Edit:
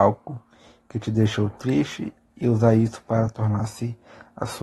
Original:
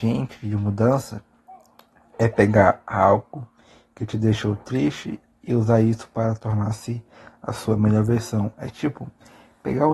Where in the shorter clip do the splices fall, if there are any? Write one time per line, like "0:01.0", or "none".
none